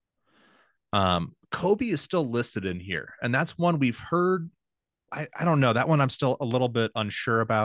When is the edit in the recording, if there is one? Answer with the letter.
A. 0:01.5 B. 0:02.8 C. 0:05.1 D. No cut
C